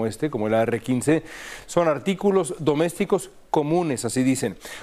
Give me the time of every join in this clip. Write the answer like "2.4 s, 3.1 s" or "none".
none